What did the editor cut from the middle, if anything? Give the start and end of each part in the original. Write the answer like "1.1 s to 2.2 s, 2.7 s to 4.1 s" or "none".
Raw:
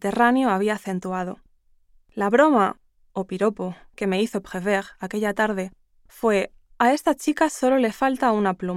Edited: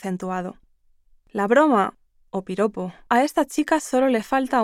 3.9 s to 6.8 s